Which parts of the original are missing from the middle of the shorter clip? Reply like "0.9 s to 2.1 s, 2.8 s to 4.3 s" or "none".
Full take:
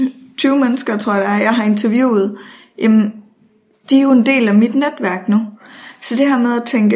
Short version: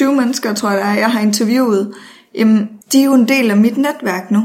3.2 s to 3.8 s